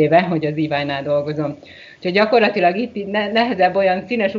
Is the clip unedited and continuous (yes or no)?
yes